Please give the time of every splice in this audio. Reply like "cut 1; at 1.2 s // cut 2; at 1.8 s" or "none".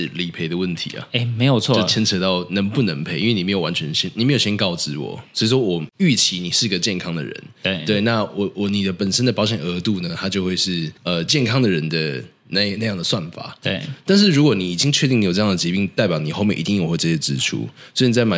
cut 1; at 11.0 s